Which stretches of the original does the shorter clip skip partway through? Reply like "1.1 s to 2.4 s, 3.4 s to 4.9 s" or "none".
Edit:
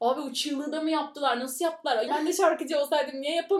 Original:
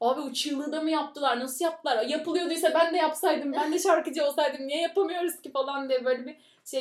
2.1 s to 3.5 s